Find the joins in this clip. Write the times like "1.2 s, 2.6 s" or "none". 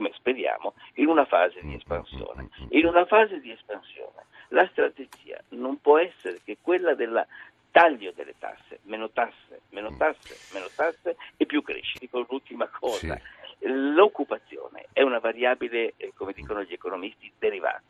12.0 s